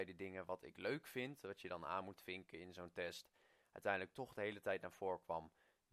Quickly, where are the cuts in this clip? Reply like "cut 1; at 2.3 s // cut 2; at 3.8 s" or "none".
none